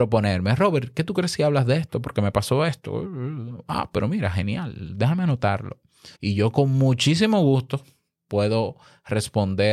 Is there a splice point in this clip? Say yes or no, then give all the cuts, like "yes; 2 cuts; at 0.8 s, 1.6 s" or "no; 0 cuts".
yes; 1 cut; at 6.1 s